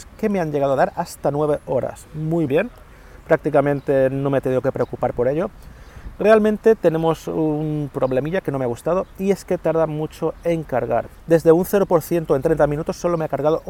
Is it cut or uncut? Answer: cut